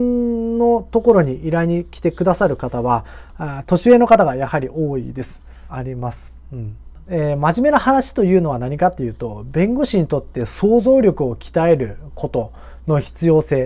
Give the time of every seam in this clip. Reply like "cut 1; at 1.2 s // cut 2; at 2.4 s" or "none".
cut 1; at 5.7 s // cut 2; at 7.0 s